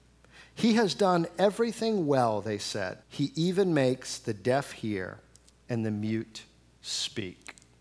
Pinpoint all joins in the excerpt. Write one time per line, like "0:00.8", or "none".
0:03.0

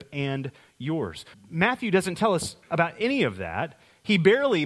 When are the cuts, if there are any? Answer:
0:01.3

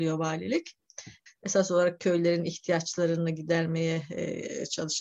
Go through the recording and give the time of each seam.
0:01.3

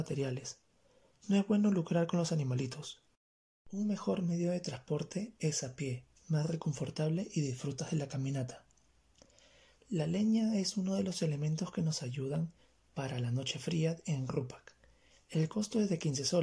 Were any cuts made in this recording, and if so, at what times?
0:06.1

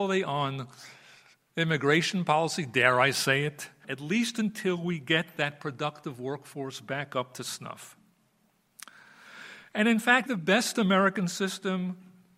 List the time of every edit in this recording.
0:03.8
0:10.3

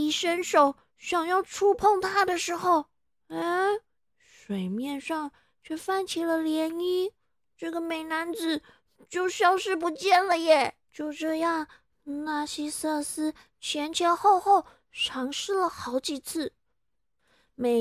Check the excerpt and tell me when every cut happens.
0:10.8

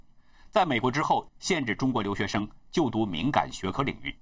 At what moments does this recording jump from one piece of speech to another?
0:01.3

